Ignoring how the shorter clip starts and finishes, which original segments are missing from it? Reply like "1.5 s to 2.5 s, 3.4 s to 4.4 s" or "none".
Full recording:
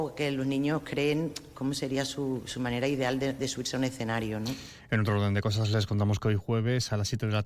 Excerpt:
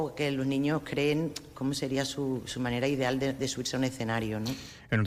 none